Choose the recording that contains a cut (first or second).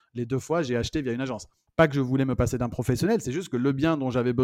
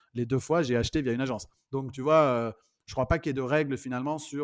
first